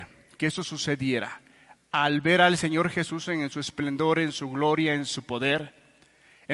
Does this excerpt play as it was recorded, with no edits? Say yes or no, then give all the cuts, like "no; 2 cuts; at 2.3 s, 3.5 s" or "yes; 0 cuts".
yes; 0 cuts